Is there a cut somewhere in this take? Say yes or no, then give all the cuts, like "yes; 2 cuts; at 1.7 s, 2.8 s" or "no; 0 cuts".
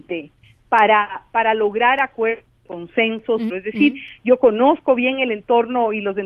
yes; 1 cut; at 3.5 s